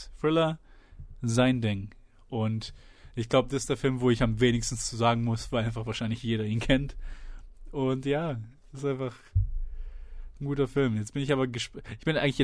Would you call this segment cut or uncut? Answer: uncut